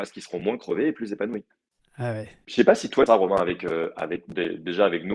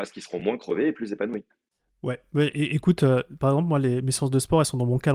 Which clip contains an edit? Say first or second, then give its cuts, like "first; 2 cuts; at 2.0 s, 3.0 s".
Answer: first; 2 cuts; at 1.8 s, 3.1 s